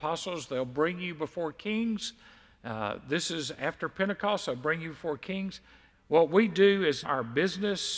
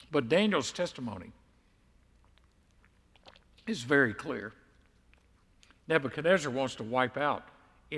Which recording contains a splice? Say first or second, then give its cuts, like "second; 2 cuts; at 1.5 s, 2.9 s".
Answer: first; 2 cuts; at 5.9 s, 7.0 s